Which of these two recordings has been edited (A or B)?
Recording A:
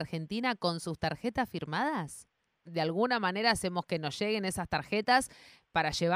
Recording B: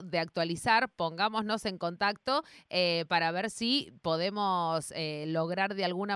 A